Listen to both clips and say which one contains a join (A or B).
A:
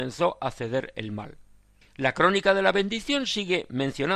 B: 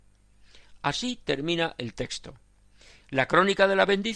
A